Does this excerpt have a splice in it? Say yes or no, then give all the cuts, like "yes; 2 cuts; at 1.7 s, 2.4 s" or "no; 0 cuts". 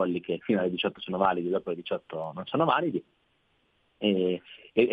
no; 0 cuts